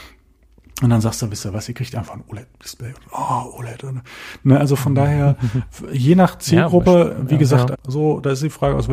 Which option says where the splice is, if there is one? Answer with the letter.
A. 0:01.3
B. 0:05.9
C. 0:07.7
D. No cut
C